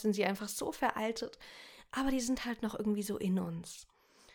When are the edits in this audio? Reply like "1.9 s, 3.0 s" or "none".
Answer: none